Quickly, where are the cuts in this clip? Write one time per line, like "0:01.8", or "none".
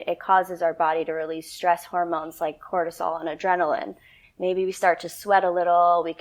0:04.2